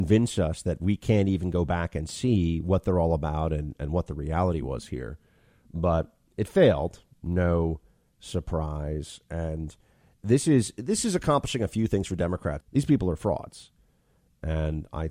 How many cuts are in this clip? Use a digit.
1